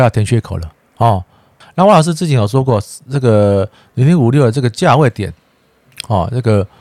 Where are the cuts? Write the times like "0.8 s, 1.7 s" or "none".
1.6 s

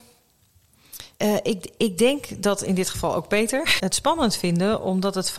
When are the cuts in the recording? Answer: 1.1 s, 3.8 s

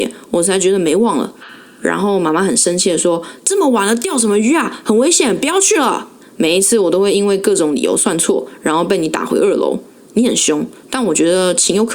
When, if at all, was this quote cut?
1.4 s, 6.2 s

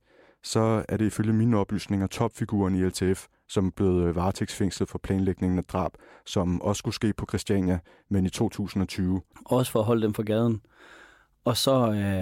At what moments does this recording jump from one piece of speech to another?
9.3 s

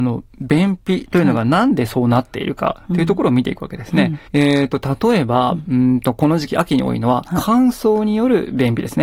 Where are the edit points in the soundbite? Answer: 4.3 s

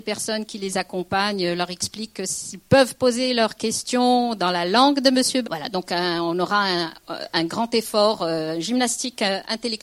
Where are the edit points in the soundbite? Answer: 5.4 s

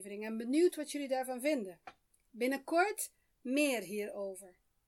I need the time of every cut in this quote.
none

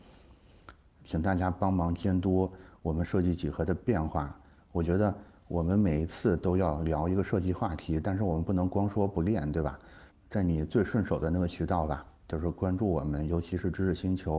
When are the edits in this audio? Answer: 10.1 s

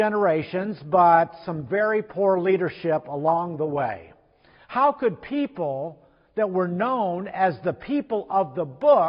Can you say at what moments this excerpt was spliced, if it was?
4.6 s

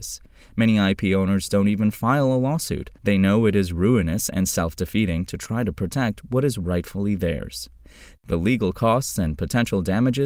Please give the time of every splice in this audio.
3.0 s, 8.2 s

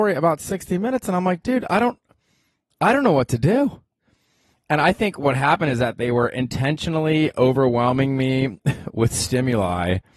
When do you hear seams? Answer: none

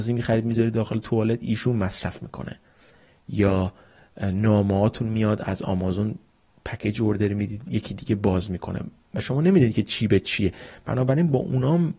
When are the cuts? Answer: none

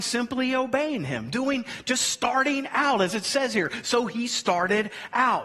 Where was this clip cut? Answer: none

